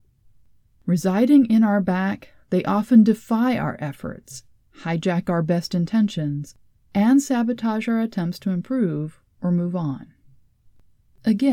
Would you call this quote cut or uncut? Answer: uncut